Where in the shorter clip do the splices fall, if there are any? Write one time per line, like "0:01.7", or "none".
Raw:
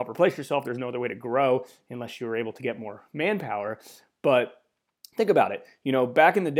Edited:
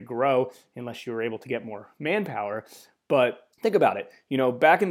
0:03.5

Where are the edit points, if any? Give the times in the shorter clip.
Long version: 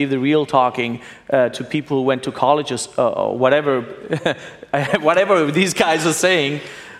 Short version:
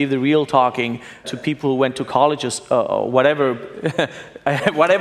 0:01.2

